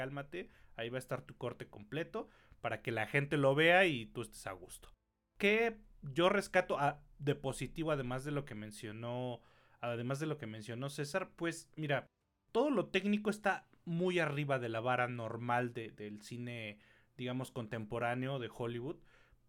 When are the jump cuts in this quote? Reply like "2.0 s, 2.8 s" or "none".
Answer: none